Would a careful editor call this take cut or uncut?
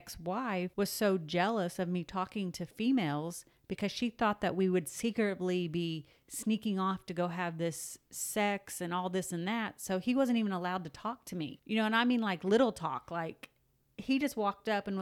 uncut